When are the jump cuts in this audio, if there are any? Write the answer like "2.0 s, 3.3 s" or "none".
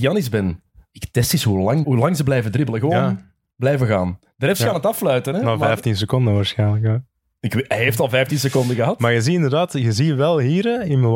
1.8 s